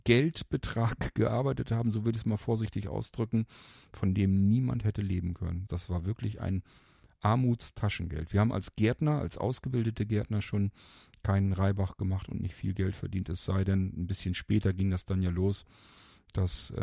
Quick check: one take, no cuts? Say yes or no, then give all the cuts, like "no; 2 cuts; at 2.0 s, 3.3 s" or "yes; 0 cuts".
no; 1 cut; at 5.7 s